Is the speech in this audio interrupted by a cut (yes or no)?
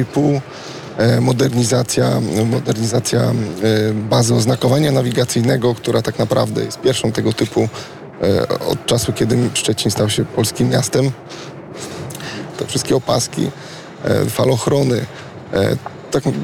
yes